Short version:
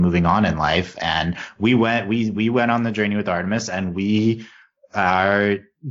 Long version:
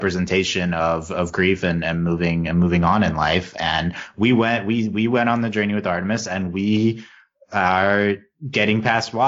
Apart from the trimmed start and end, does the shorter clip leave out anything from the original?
no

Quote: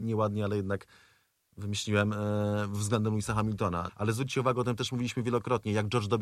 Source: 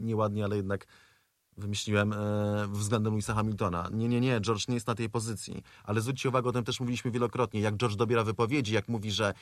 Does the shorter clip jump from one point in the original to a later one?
yes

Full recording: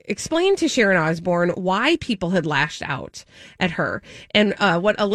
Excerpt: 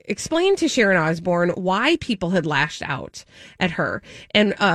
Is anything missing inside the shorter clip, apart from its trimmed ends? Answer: no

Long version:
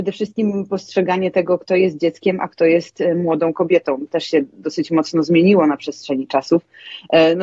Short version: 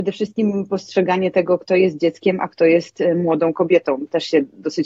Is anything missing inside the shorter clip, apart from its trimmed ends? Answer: no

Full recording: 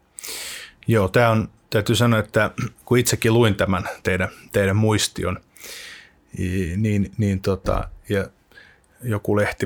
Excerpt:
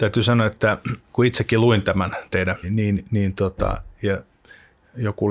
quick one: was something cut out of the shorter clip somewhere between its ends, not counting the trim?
yes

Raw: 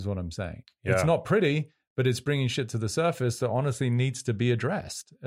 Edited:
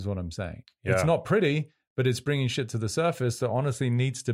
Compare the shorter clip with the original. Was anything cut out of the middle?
no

